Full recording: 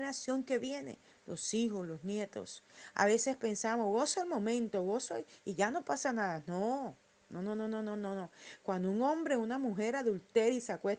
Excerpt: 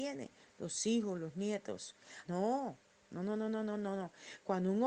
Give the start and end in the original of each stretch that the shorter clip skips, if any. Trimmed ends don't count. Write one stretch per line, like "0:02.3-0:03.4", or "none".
0:02.9-0:06.4